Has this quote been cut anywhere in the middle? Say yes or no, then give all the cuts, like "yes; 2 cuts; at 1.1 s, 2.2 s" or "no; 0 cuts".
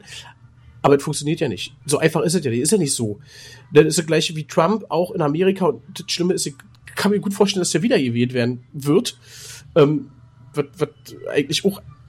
no; 0 cuts